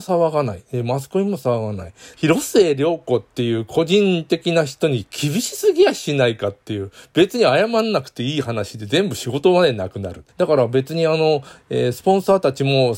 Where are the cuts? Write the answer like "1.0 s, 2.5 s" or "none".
2.1 s, 10.3 s